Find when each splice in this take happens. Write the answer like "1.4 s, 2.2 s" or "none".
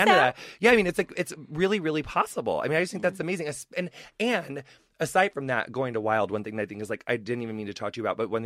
none